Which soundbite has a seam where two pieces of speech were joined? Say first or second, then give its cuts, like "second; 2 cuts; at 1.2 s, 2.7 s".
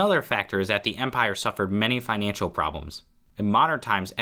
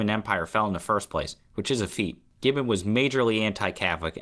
second; 1 cut; at 2.3 s